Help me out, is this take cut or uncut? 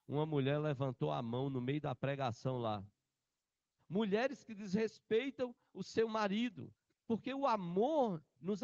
cut